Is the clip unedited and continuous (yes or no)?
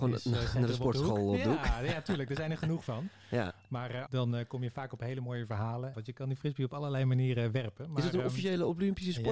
no